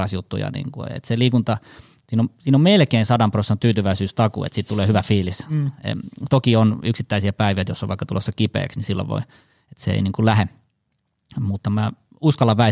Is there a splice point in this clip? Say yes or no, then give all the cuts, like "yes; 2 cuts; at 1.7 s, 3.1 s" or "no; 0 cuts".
no; 0 cuts